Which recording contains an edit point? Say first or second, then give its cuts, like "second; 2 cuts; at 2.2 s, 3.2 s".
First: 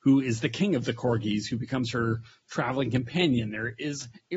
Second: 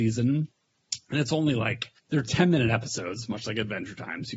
second; 1 cut; at 2.0 s